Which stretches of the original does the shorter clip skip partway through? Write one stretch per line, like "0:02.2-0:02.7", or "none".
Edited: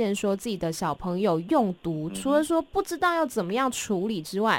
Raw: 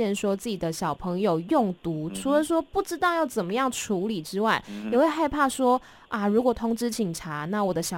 none